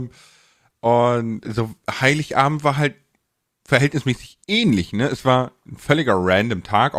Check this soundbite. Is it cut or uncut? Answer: cut